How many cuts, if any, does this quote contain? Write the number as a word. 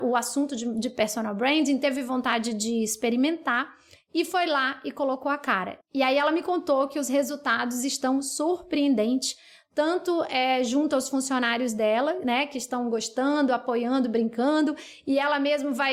zero